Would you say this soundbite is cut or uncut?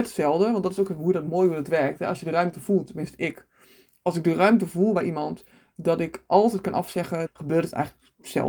cut